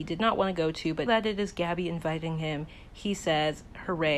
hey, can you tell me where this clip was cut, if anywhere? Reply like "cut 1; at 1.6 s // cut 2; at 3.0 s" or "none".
cut 1; at 1.1 s